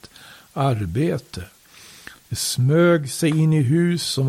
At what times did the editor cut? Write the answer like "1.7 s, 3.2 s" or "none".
none